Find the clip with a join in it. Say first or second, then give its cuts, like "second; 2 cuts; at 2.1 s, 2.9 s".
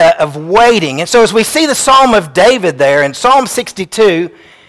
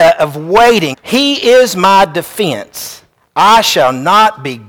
second; 1 cut; at 0.9 s